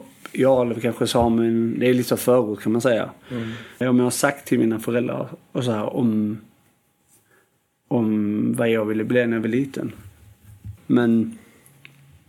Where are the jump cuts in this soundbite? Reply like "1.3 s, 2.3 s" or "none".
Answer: 3.8 s, 10.8 s

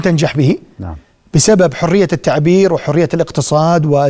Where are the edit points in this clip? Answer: none

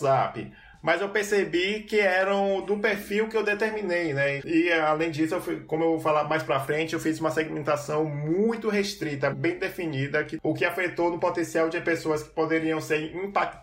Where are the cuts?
4.4 s, 9.3 s

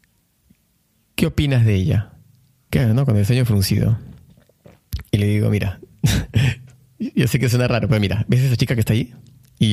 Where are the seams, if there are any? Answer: 2.7 s

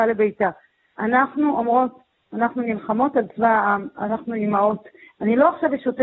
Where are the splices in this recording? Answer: none

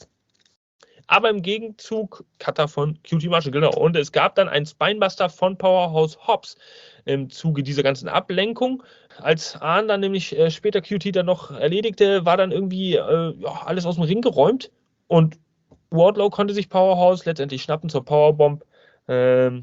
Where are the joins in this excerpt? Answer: 2.3 s, 9.1 s

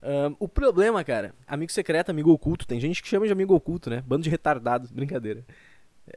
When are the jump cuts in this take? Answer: 1.4 s

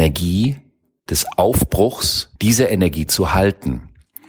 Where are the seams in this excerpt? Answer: 2.4 s

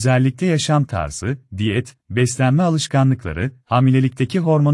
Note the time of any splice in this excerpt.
3.6 s

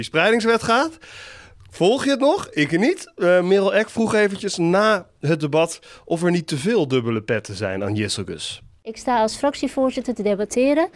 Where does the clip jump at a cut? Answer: none

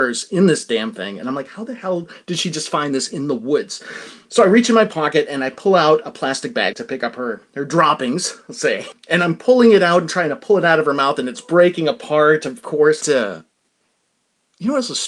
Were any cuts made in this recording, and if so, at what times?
6.7 s, 8.9 s, 13.0 s

